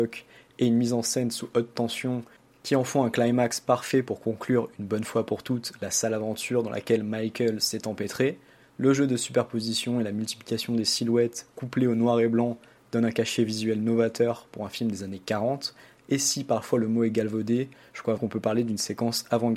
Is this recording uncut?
no; 1 cut; at 18.2 s

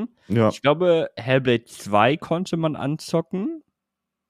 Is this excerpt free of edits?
yes; 0 cuts

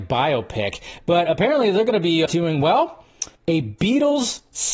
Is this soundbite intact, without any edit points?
no; 2 cuts; at 2.3 s, 3.4 s

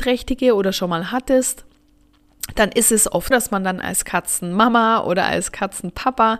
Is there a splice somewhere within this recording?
yes; 1 cut; at 3.3 s

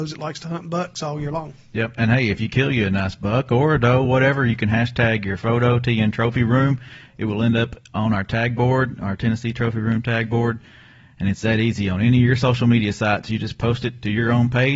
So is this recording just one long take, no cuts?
yes; 0 cuts

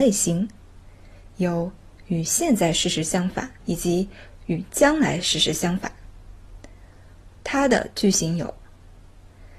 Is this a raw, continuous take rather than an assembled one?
no; 2 cuts; at 3.6 s, 7.4 s

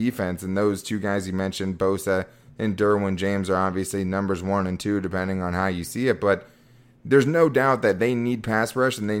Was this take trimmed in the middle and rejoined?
no; 0 cuts

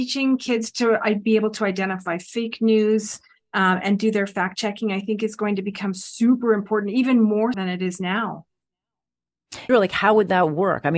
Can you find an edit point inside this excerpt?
yes; 2 cuts; at 7.5 s, 9.7 s

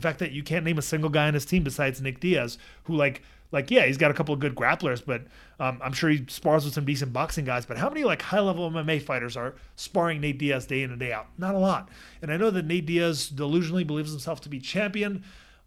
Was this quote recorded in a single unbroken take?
yes; 0 cuts

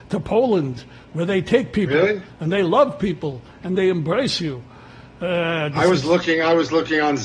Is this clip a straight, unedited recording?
yes; 0 cuts

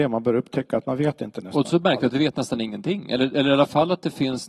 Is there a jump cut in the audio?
no; 0 cuts

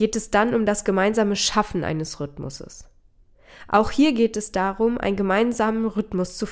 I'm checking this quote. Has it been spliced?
no; 0 cuts

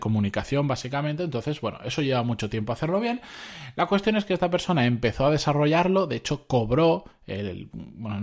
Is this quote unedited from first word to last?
yes; 0 cuts

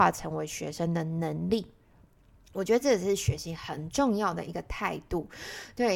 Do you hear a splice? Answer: no; 0 cuts

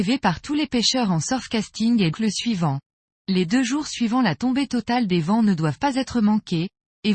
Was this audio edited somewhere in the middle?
yes; 1 cut; at 2.1 s

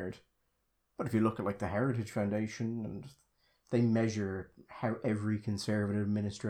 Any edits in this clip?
no; 0 cuts

